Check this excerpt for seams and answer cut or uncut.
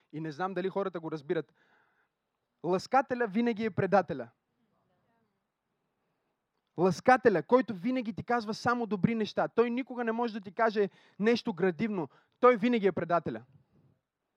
uncut